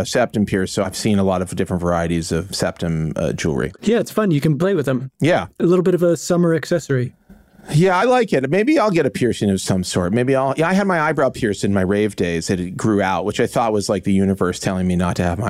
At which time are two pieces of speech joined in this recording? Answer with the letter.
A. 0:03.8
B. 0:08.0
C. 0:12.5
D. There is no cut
D